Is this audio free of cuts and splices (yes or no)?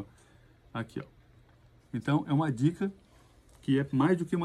no